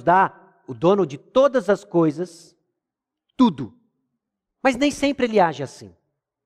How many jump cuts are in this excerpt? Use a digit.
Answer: 0